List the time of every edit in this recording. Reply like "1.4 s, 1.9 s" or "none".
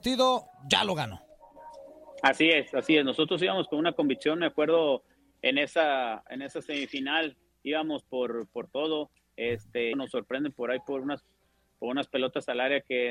9.9 s